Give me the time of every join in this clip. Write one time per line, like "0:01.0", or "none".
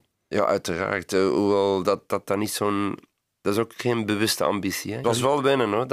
0:05.0

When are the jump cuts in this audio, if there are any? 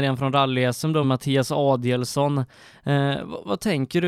0:01.0

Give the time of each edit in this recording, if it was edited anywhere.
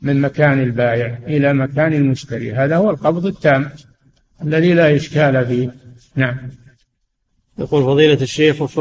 none

